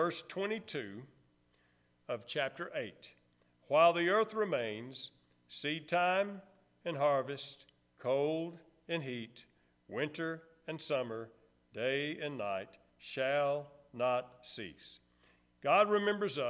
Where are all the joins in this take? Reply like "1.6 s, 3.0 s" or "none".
none